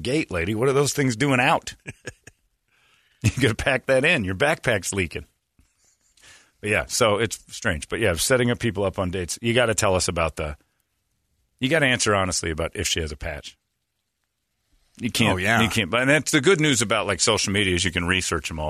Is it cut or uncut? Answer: uncut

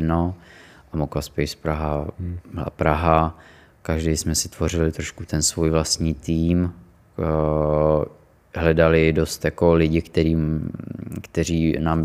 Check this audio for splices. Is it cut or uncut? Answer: uncut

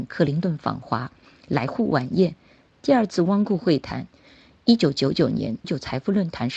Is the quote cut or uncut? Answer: cut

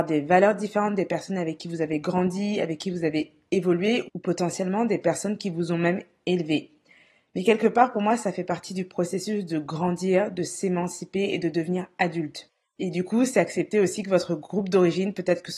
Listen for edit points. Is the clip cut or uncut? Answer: cut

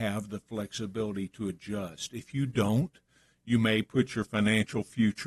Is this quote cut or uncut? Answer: uncut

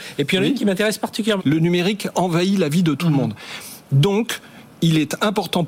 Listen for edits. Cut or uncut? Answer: cut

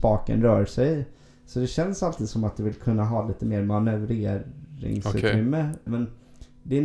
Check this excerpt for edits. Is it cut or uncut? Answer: cut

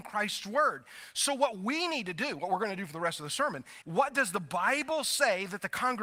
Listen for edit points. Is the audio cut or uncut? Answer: cut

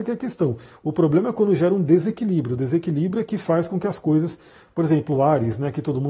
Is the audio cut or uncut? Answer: uncut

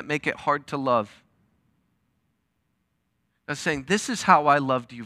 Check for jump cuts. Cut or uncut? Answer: uncut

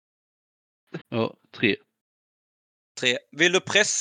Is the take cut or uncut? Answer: cut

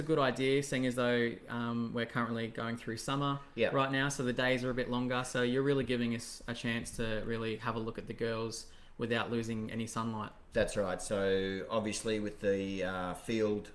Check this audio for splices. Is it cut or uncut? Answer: uncut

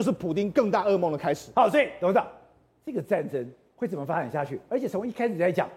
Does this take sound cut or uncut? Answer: uncut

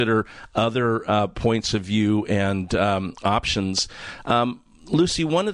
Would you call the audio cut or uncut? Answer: uncut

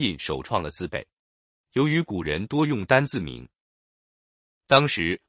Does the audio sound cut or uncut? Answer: uncut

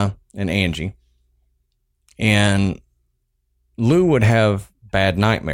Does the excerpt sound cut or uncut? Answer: uncut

